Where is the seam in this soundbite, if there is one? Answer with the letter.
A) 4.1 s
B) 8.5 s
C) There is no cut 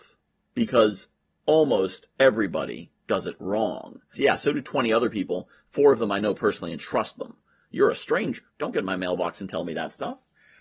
A